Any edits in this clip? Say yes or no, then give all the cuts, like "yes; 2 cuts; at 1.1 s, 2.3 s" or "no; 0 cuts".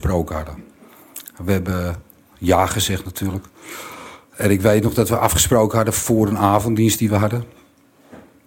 no; 0 cuts